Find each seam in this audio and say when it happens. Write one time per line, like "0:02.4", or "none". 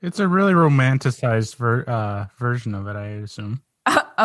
none